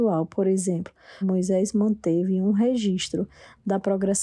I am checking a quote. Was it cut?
yes; 1 cut; at 1.2 s

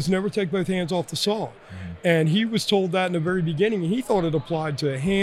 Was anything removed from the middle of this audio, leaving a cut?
no; 0 cuts

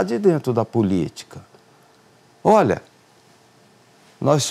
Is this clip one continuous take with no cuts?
yes; 0 cuts

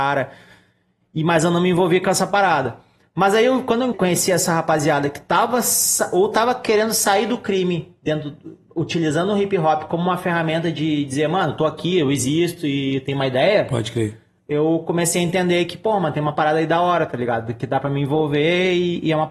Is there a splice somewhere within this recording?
yes; 1 cut; at 3.9 s

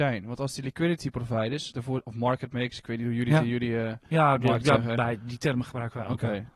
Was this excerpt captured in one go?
yes; 0 cuts

